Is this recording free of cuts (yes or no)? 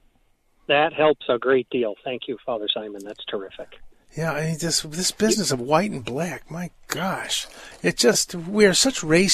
yes